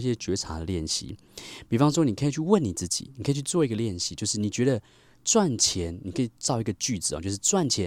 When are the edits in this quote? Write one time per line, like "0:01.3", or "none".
none